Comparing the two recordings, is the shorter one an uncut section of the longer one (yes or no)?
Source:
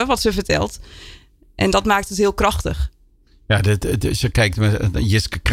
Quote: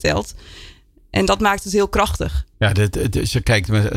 no